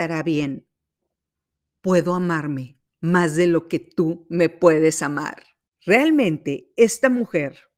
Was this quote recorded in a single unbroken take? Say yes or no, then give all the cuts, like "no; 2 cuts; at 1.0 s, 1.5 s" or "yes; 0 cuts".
no; 1 cut; at 5.7 s